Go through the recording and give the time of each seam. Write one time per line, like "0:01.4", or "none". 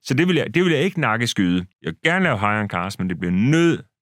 0:01.7